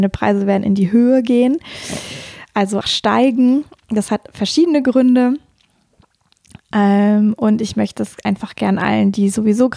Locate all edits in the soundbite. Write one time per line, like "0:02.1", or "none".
0:02.8